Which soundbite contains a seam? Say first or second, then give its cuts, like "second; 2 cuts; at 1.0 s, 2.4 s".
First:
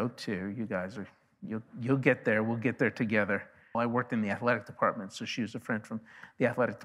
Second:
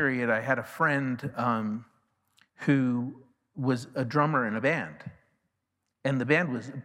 first; 1 cut; at 3.7 s